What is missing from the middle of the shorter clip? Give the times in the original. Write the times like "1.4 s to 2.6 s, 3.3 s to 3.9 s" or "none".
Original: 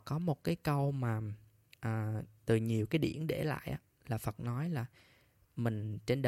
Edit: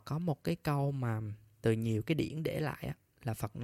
1.5 s to 2.3 s